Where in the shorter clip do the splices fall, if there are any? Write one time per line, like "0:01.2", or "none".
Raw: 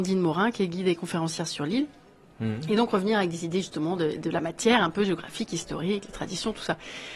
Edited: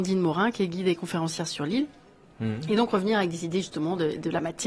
none